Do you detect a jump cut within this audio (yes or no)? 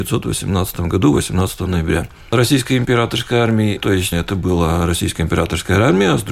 yes